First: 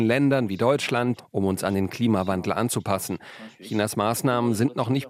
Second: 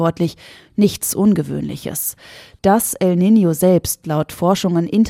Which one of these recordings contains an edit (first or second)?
first